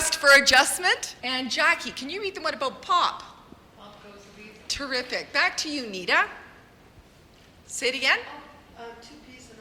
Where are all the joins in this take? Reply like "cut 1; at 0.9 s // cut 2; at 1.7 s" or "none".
cut 1; at 1.2 s

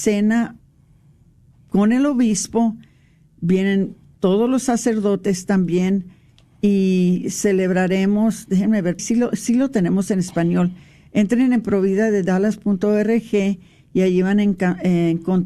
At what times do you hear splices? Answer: cut 1; at 9.0 s

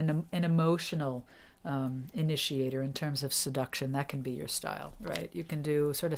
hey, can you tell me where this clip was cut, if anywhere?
none

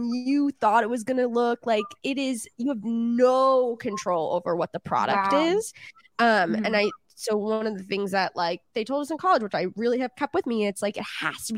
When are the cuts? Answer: none

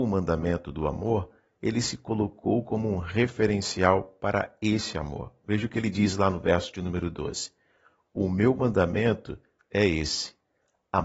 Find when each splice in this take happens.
none

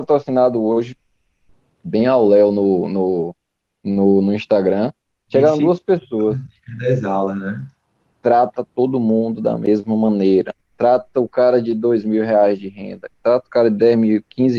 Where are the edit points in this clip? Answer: cut 1; at 8.1 s // cut 2; at 13.2 s

